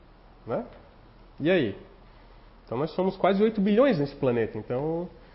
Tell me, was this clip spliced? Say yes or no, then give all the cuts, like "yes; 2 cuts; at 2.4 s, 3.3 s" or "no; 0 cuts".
no; 0 cuts